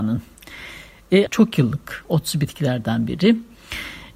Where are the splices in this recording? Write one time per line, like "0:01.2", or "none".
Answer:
0:01.3